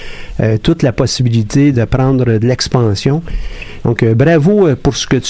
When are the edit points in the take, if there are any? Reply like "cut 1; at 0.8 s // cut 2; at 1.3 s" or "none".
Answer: cut 1; at 1.7 s // cut 2; at 3.8 s